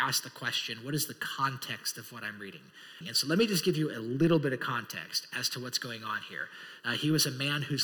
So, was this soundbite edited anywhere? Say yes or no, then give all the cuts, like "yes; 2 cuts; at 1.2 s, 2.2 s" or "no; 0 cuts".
yes; 2 cuts; at 3.0 s, 6.8 s